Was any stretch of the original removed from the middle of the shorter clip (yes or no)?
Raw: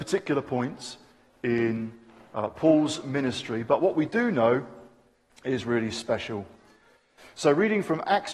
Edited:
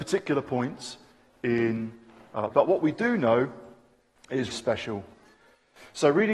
yes